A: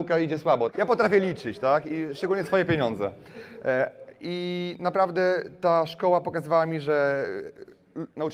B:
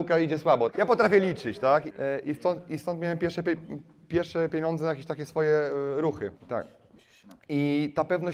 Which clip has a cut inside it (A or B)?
B